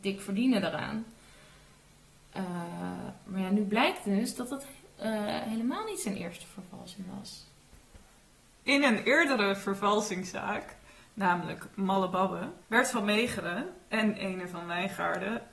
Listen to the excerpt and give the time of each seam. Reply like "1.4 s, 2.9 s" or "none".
11.0 s, 12.6 s